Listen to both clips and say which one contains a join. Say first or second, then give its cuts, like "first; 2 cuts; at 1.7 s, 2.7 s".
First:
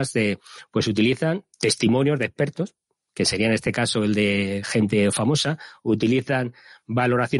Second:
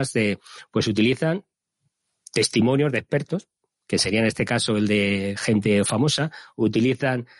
first; 1 cut; at 1.5 s